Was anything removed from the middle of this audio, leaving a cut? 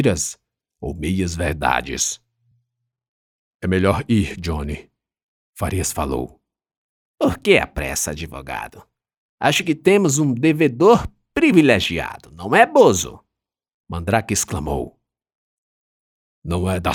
no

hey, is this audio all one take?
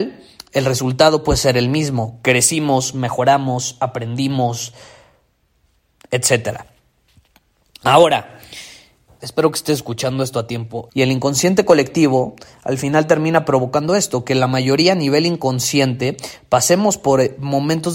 no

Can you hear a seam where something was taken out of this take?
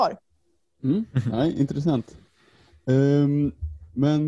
no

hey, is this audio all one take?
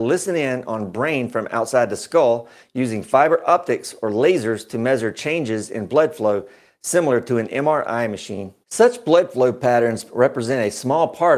no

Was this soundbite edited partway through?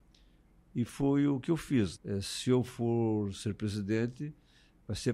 yes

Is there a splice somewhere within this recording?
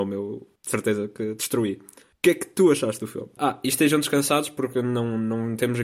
no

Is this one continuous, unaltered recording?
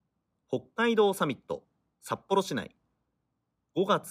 yes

